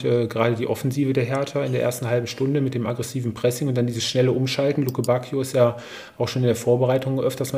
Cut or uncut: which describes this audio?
uncut